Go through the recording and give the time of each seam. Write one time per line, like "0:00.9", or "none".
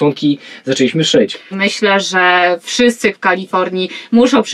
0:01.5
0:03.1